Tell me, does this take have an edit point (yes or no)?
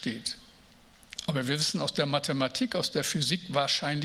no